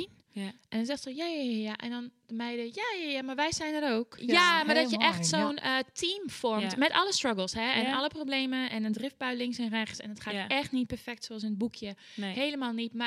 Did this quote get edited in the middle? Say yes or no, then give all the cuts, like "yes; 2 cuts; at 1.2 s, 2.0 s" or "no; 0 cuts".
yes; 1 cut; at 4.2 s